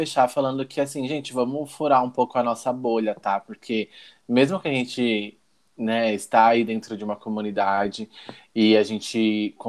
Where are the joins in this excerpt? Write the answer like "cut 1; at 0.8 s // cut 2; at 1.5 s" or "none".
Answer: none

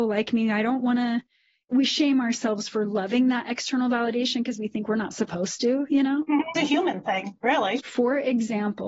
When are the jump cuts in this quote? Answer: cut 1; at 6.5 s // cut 2; at 7.8 s

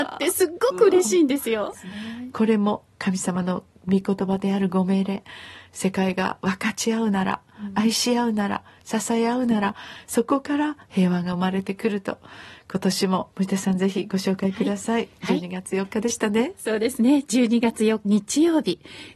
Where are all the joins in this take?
cut 1; at 1.7 s // cut 2; at 13.3 s // cut 3; at 18.0 s

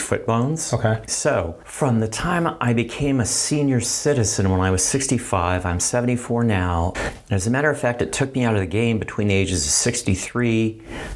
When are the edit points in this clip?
cut 1; at 1.1 s // cut 2; at 6.9 s

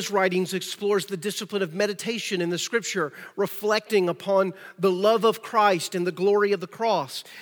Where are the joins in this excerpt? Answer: none

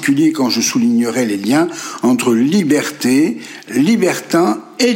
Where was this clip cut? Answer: none

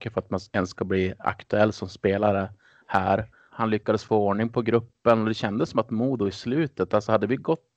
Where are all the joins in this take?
cut 1; at 3.5 s

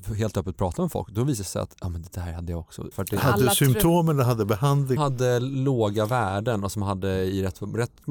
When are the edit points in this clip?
cut 1; at 2.9 s // cut 2; at 5.0 s

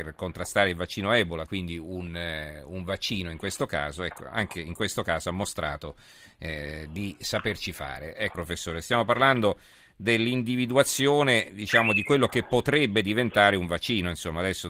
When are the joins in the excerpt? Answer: cut 1; at 8.3 s

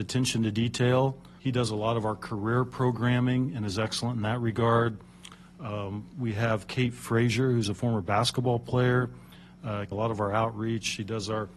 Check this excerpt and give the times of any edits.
cut 1; at 1.4 s // cut 2; at 9.9 s

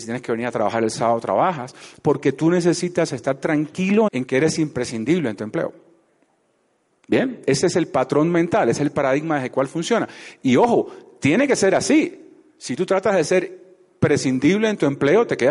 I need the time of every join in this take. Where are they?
cut 1; at 4.1 s

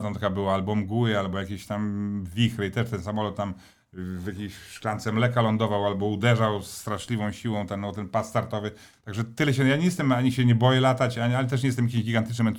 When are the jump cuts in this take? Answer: none

